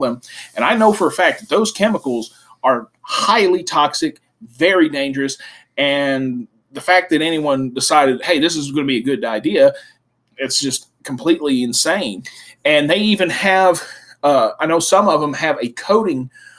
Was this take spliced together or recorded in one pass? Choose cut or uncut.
uncut